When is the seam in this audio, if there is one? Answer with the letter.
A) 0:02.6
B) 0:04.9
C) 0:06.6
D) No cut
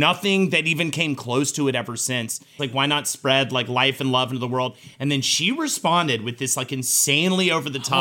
A